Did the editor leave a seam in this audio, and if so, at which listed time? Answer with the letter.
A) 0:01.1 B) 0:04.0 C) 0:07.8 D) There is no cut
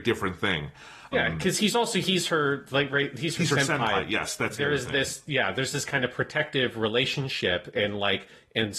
A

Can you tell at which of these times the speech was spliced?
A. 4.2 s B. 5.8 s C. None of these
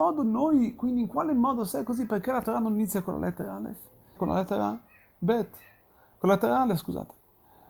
A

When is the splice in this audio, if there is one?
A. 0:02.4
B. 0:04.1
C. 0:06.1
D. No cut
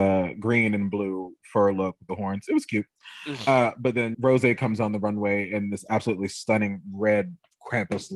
B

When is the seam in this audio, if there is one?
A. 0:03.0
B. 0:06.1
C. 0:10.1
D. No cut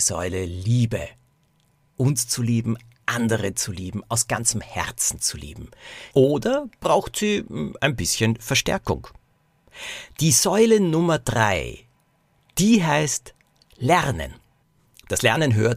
B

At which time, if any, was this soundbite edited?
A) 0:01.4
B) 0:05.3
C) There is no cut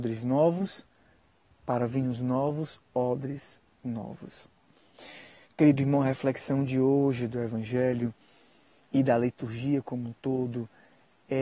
C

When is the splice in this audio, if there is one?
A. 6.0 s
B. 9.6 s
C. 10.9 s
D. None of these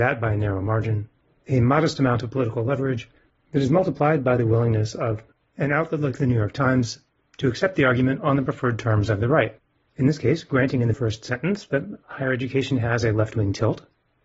C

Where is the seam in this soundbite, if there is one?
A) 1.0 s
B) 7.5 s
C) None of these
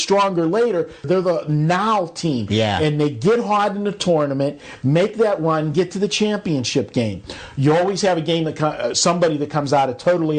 A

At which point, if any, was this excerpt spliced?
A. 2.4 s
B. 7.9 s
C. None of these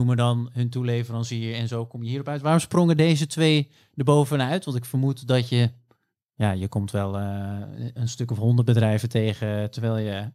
C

